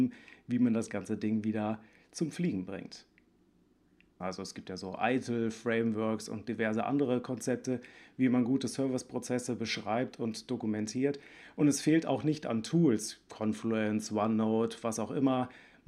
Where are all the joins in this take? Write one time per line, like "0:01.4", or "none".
0:04.2